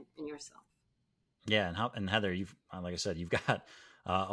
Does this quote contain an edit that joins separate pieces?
no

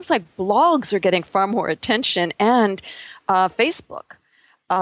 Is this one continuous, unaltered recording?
yes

